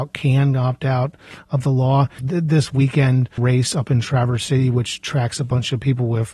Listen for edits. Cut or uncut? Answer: cut